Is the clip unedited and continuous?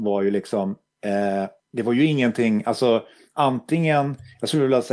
no; 1 cut; at 1.6 s

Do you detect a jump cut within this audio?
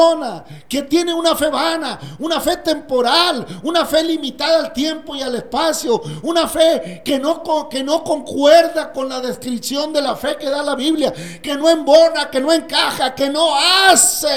no; 0 cuts

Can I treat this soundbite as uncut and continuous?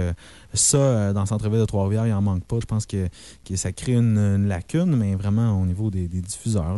no; 1 cut; at 2.6 s

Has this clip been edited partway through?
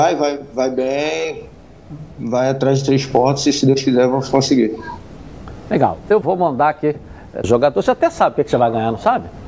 yes; 2 cuts; at 6.2 s, 7.4 s

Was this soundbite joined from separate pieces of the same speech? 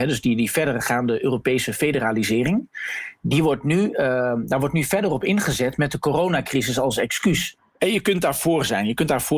yes; 1 cut; at 7.6 s

